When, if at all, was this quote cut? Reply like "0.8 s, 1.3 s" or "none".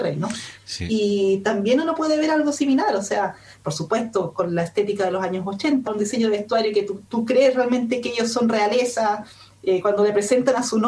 5.9 s